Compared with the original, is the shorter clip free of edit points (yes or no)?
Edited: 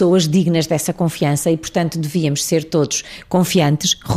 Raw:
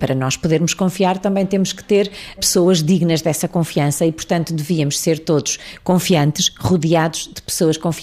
yes